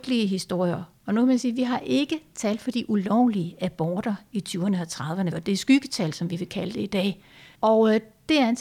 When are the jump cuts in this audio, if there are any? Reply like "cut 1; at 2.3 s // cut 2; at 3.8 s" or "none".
cut 1; at 5.3 s // cut 2; at 7.5 s